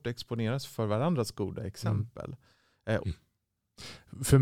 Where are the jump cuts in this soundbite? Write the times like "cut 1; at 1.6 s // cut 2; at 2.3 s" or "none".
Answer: cut 1; at 3.0 s